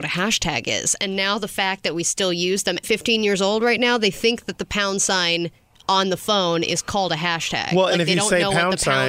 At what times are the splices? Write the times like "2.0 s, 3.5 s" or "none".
2.8 s